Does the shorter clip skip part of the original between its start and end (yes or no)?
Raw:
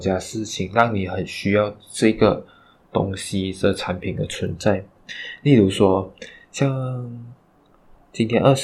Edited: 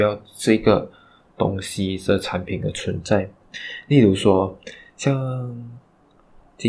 no